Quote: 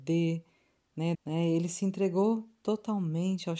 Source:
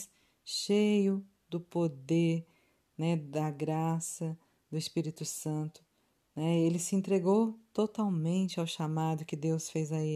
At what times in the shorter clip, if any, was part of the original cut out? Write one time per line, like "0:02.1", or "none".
0:01.1